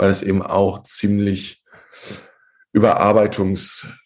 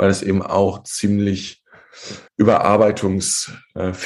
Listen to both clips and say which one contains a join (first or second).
second